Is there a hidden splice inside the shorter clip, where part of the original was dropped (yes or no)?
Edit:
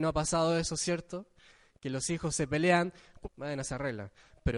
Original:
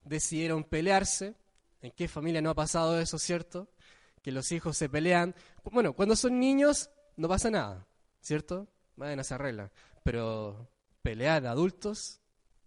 yes